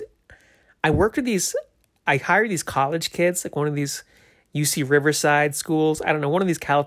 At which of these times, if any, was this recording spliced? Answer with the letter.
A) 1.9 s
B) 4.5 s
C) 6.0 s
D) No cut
D